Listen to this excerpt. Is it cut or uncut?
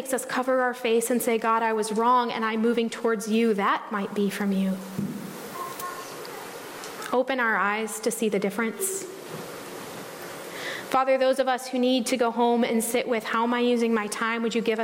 uncut